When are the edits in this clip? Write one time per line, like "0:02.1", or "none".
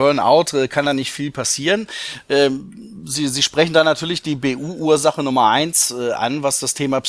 none

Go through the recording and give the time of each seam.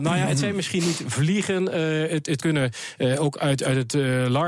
none

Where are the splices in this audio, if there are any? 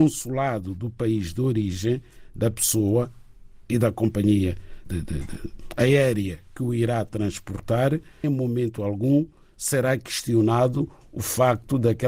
0:04.9
0:08.2

